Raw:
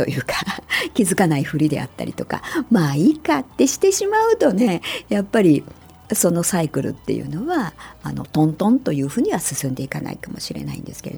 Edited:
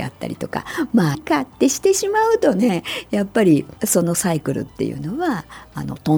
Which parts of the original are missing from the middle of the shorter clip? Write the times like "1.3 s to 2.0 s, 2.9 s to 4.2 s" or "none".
2.9 s to 3.1 s, 5.8 s to 6.1 s